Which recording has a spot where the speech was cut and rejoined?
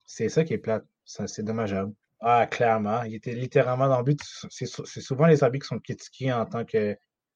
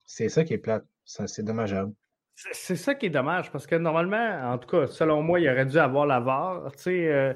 first; 2 cuts; at 2.1 s, 4.2 s

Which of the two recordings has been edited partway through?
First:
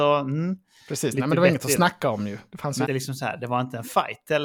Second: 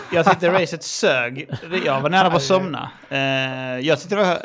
first; 1 cut; at 2.8 s

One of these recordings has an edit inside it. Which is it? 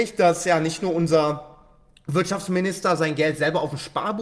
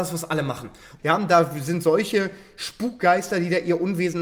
second; 1 cut; at 1.0 s

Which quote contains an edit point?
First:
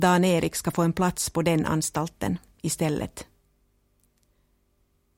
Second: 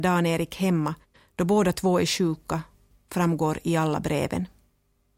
second; 1 cut; at 2.9 s

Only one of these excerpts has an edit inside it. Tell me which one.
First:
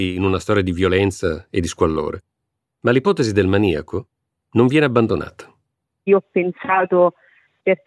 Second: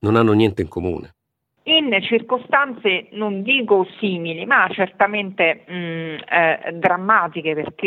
second; 1 cut; at 1.6 s

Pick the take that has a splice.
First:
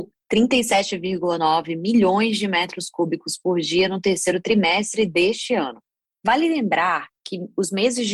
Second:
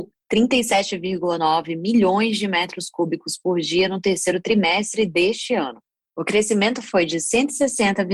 first; 1 cut; at 6.1 s

